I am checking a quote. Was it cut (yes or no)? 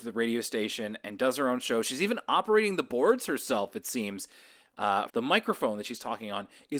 yes